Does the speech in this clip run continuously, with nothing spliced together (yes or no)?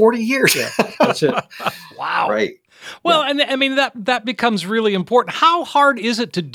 yes